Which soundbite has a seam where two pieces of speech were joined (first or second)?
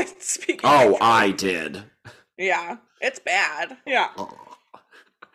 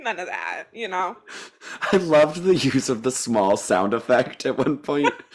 first